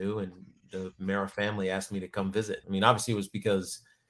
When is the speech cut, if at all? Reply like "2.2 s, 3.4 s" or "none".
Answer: 2.6 s